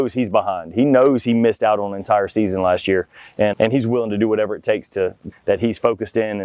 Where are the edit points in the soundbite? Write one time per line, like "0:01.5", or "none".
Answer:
0:03.5
0:05.3